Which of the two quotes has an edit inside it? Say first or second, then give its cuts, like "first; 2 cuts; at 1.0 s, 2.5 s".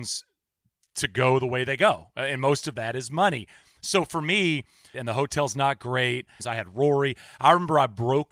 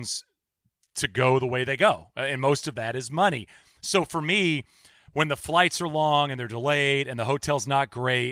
first; 2 cuts; at 4.9 s, 6.4 s